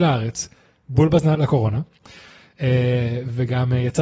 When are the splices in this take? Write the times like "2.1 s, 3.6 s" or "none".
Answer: 1.3 s